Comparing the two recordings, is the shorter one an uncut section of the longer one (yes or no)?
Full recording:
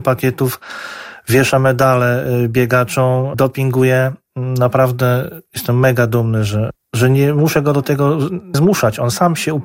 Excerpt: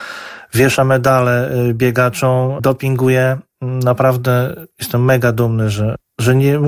yes